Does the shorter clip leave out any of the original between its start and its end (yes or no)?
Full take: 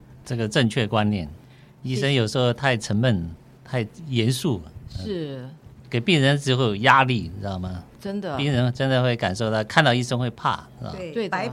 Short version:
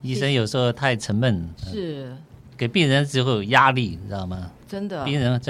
yes